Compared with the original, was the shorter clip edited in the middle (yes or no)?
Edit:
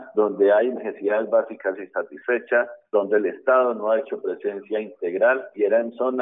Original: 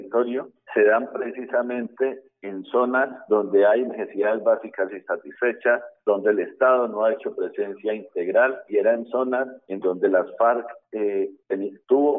no